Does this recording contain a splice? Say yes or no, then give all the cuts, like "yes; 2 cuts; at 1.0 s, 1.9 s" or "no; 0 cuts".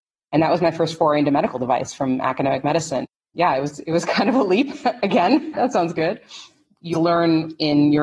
yes; 2 cuts; at 5.5 s, 6.9 s